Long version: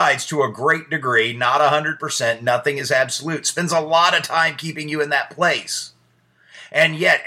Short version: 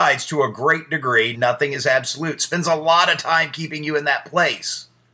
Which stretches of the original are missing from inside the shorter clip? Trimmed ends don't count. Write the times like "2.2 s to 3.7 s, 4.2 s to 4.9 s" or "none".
1.3 s to 2.4 s